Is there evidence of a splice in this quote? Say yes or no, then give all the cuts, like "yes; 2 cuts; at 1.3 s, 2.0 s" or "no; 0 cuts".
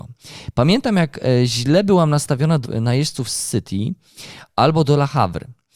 yes; 1 cut; at 2.6 s